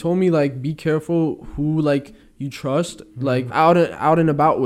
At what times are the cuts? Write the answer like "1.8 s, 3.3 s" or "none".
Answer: 3.5 s